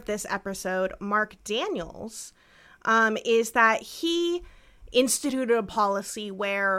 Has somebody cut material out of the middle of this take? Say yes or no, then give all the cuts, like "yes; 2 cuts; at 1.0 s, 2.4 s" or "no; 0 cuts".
no; 0 cuts